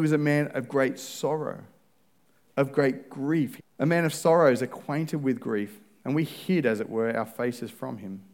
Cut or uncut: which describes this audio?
cut